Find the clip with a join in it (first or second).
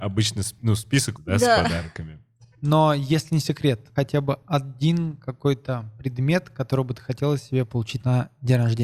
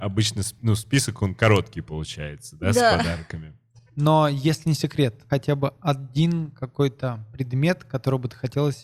first